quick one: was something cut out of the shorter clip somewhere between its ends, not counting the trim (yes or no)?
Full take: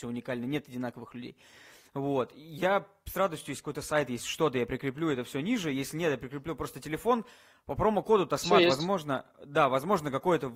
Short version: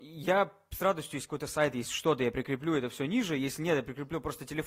no